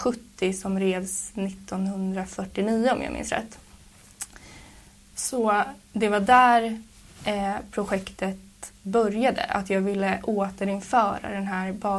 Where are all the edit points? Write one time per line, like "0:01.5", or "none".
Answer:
none